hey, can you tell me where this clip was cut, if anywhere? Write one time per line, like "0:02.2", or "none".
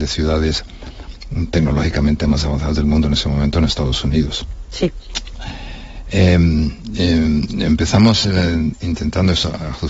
none